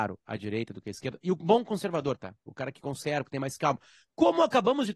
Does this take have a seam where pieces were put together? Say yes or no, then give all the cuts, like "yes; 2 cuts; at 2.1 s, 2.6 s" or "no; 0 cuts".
no; 0 cuts